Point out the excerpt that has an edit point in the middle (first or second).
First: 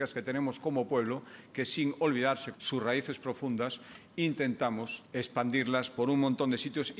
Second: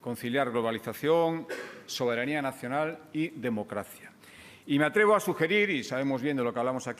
first